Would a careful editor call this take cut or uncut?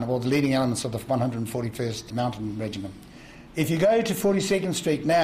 cut